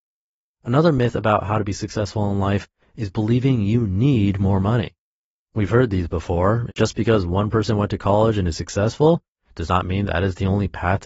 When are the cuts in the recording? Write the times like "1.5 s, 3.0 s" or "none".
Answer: 6.7 s, 10.0 s